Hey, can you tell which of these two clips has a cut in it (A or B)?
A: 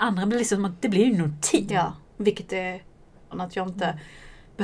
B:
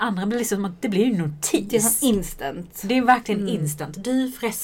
A